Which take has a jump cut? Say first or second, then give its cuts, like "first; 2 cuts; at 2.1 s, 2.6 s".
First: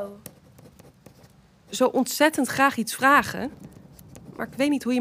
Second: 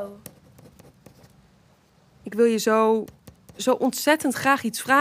first; 1 cut; at 1.6 s